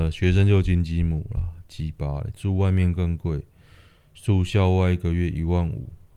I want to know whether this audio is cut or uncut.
uncut